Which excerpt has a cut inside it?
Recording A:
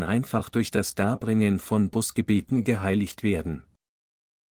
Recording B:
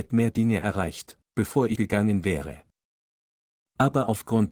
B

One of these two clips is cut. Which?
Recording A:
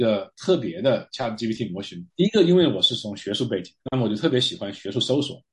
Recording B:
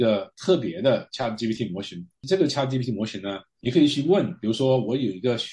A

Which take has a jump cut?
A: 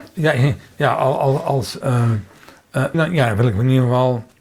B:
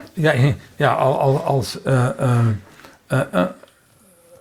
A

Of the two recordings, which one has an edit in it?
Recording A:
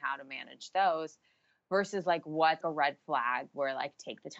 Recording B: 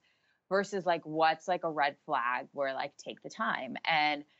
A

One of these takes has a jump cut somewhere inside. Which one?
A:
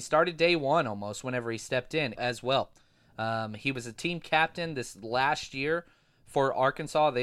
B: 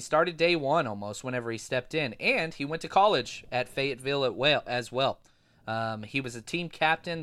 A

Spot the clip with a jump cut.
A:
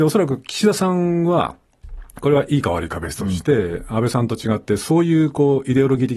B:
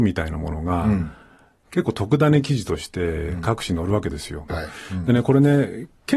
B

